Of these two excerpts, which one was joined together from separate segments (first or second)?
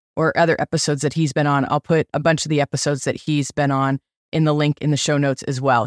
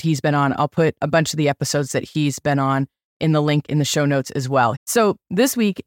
second